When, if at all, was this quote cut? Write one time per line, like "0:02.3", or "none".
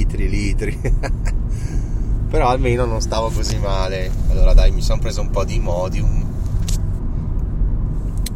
0:07.0